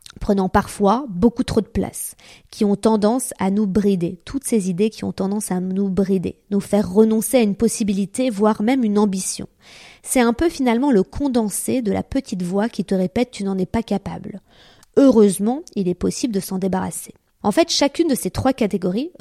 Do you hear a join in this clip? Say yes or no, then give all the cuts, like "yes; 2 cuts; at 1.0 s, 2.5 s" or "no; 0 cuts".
yes; 1 cut; at 17.4 s